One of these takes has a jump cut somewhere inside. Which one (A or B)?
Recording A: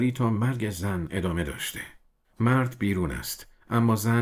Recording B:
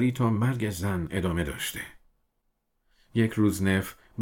A